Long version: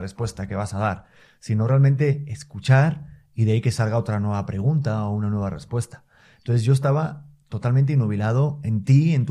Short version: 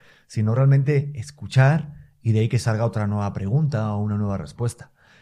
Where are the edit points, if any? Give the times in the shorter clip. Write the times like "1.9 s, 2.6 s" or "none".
none